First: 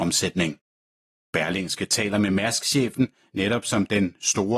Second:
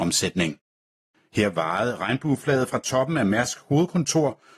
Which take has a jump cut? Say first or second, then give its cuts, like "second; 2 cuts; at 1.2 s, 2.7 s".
second; 1 cut; at 1.1 s